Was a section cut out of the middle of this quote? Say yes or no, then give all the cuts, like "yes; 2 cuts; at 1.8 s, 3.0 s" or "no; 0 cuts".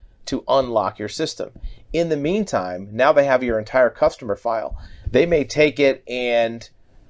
yes; 1 cut; at 5.0 s